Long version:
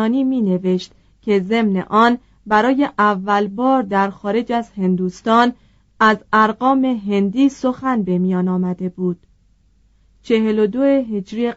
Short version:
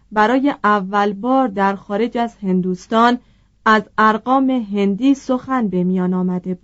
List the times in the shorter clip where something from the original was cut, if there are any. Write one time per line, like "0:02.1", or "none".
none